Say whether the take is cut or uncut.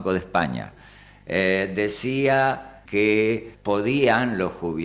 cut